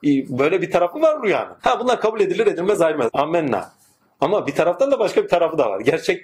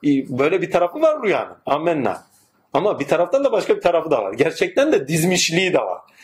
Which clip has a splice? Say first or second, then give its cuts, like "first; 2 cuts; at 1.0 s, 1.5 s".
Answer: first; 2 cuts; at 1.6 s, 3.1 s